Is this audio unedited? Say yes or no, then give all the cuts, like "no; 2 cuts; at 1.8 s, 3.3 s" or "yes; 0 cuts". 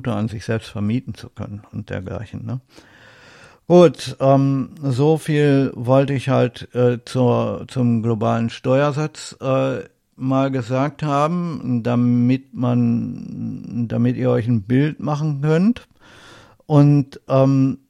yes; 0 cuts